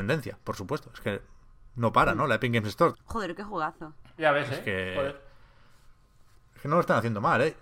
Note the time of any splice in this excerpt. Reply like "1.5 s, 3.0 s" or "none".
2.9 s